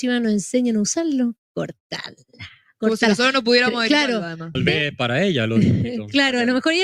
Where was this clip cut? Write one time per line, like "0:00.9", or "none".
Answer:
0:01.4
0:04.5